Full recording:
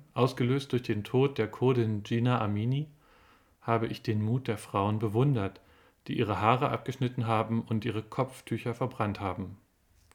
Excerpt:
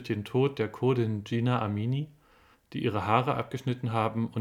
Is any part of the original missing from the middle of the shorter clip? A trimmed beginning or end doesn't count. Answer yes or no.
yes